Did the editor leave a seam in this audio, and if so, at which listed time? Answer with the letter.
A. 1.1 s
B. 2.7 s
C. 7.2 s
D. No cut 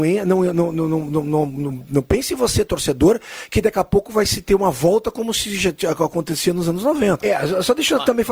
C